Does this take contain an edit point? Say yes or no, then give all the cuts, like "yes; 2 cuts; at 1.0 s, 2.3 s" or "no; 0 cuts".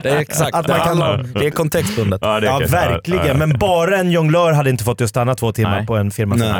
no; 0 cuts